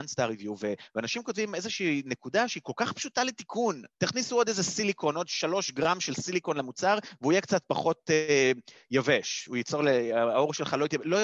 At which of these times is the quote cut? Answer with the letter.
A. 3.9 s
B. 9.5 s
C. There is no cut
A